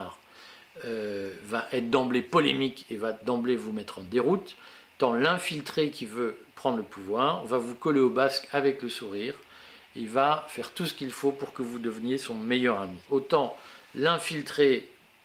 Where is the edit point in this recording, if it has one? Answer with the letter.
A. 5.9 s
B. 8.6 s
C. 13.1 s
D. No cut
C